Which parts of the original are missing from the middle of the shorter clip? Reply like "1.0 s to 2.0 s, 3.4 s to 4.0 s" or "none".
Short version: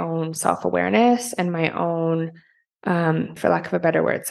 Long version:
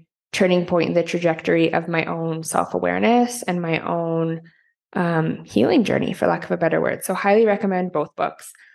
5.5 s to 6.1 s